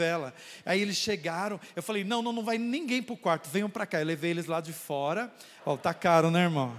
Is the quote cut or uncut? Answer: cut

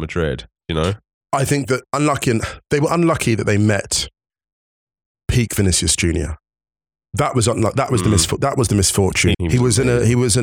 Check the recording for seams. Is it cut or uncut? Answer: cut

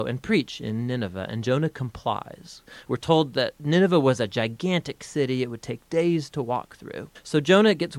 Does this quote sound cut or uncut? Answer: uncut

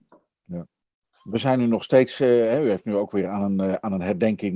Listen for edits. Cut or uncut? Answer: uncut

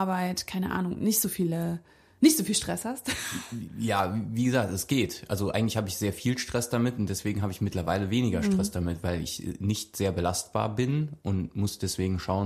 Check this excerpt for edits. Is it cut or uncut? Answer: uncut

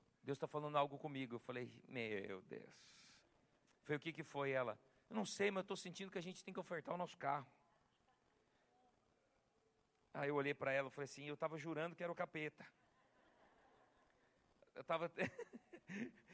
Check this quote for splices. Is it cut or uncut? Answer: uncut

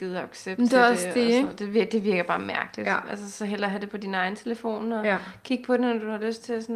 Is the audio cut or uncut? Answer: uncut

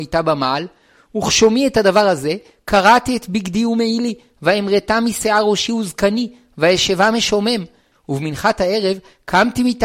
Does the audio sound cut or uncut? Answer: cut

